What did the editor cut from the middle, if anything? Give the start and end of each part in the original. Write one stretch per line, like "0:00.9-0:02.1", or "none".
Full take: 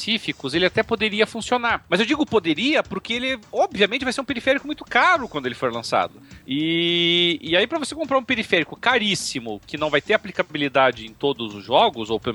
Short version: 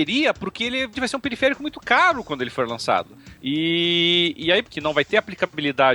0:03.4-0:04.0
0:07.7-0:09.6